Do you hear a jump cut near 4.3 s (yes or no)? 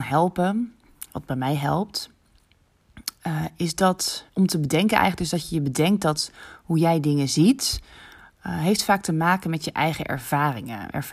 yes